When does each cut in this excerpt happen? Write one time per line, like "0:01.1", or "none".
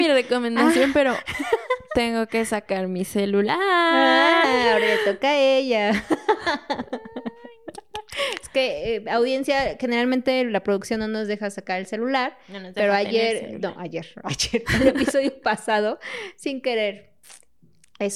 none